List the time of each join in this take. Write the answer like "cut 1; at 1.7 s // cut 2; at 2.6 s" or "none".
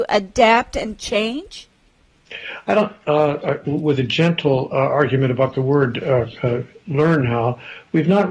cut 1; at 3.4 s